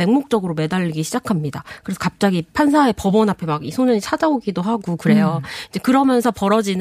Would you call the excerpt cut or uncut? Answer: uncut